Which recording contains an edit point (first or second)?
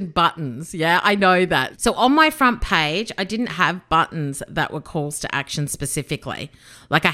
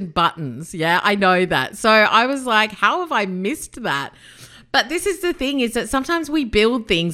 first